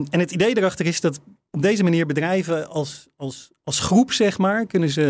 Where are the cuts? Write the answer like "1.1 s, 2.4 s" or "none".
none